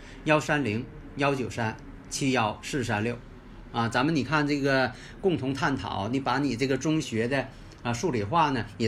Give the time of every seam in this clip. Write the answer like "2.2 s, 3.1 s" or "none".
7.0 s